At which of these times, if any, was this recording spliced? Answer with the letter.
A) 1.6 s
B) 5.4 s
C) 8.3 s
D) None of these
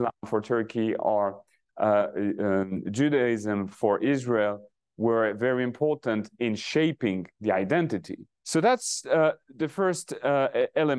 C